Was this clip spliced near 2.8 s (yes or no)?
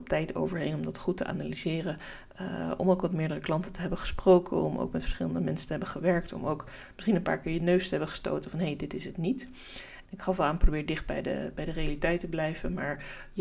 no